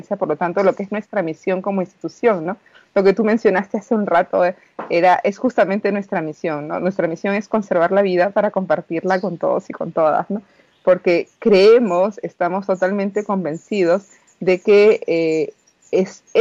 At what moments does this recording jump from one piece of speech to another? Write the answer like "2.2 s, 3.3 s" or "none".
none

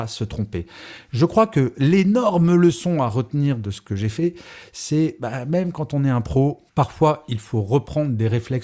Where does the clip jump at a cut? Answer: 6.7 s

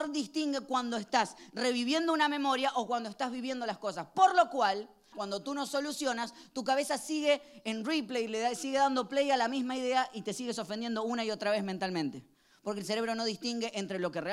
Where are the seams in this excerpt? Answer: 5.1 s

